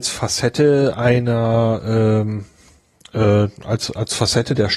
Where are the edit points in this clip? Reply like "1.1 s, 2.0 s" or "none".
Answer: none